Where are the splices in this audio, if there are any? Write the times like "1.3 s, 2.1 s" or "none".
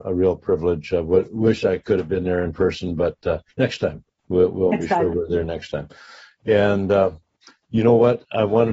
none